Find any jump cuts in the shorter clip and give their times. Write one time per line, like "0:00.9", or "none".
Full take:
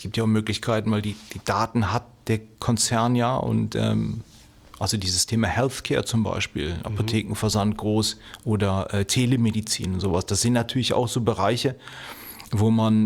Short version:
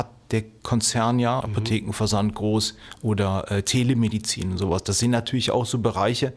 0:01.4